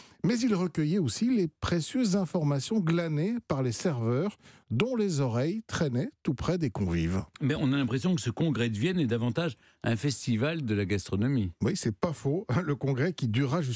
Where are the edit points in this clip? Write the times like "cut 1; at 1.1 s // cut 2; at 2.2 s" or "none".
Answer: none